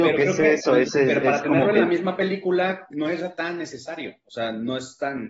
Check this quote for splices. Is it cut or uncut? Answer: cut